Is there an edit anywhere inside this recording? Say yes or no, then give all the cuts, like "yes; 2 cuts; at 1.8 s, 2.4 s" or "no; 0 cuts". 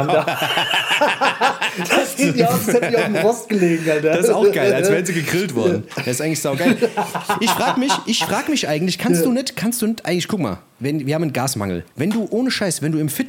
yes; 1 cut; at 11.9 s